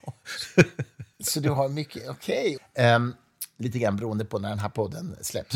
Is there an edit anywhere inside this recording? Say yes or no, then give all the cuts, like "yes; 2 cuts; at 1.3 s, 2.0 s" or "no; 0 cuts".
yes; 2 cuts; at 1.1 s, 2.6 s